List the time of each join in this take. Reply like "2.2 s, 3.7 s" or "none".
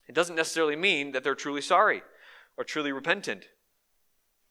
none